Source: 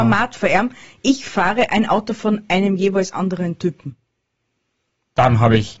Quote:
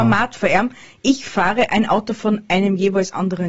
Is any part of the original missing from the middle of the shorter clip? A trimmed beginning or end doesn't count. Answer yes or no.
no